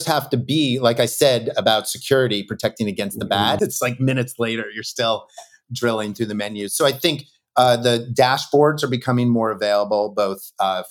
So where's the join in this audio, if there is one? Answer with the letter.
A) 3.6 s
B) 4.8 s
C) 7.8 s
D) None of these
A